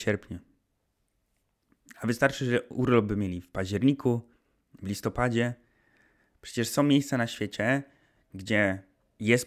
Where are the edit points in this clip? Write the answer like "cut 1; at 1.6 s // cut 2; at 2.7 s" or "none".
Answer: none